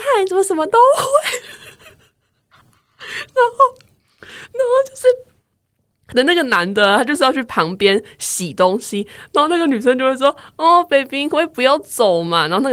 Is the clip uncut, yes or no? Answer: yes